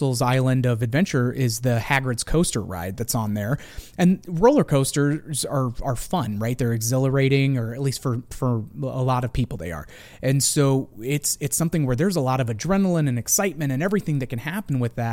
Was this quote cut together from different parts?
no; 0 cuts

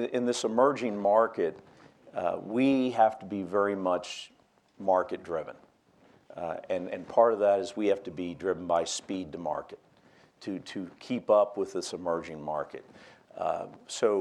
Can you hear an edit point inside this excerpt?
no; 0 cuts

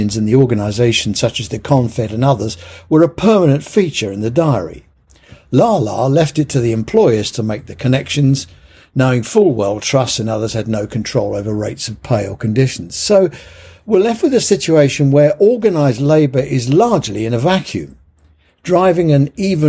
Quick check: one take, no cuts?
yes; 0 cuts

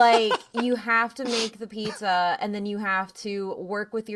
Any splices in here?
no; 0 cuts

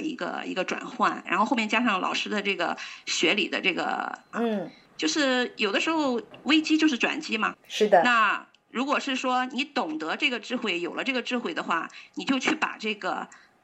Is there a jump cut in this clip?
yes; 3 cuts; at 1.2 s, 4.3 s, 7.5 s

